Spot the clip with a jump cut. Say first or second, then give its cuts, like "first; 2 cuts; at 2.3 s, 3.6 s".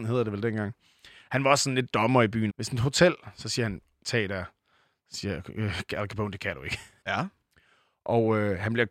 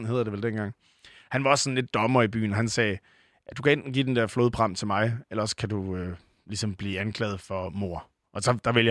first; 3 cuts; at 2.5 s, 4.0 s, 7.0 s